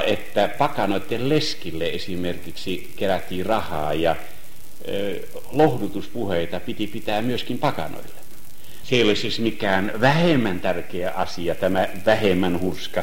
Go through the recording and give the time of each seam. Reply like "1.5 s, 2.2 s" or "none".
8.8 s